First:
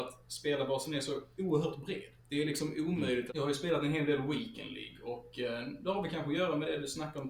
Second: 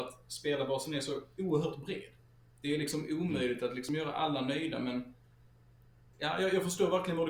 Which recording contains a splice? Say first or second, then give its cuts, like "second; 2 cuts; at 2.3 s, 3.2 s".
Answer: first; 2 cuts; at 2.2 s, 3.3 s